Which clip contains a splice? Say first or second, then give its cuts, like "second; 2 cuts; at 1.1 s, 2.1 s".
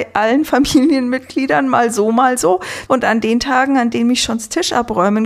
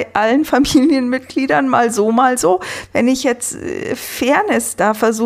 first; 1 cut; at 2.9 s